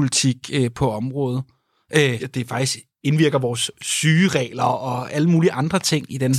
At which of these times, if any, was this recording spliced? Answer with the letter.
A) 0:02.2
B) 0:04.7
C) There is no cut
A